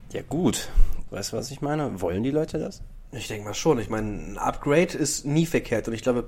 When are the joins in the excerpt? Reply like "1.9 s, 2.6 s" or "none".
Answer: 1.1 s